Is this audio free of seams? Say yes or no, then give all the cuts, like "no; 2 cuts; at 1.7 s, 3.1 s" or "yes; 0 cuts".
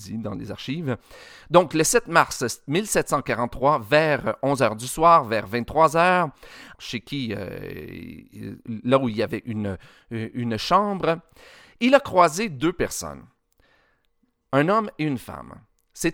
no; 1 cut; at 6.7 s